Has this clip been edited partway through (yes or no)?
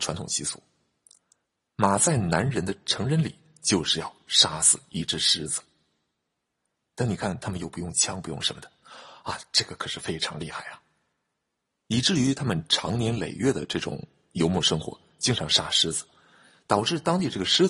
no